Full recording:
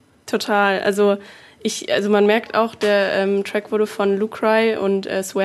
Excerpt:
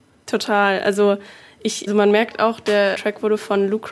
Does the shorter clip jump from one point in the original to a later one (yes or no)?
yes